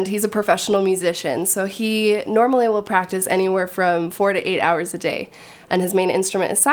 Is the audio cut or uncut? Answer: uncut